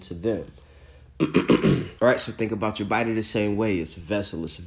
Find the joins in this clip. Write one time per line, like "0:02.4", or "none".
0:02.0